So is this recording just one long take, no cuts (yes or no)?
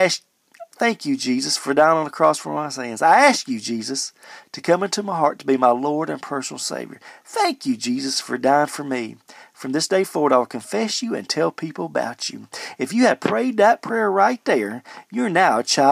yes